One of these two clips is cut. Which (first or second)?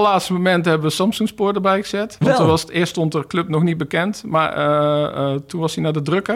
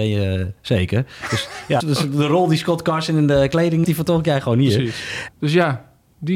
second